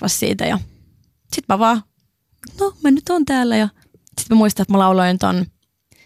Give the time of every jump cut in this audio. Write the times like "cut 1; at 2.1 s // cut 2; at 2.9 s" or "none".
cut 1; at 2.5 s